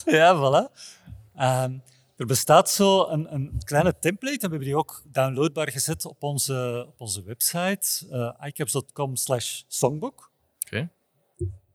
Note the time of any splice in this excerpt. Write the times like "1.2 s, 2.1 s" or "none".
none